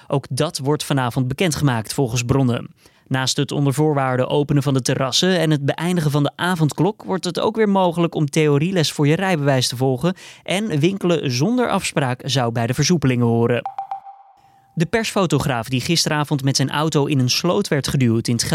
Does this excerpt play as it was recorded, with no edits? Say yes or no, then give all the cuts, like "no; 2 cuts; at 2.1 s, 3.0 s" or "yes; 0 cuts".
yes; 0 cuts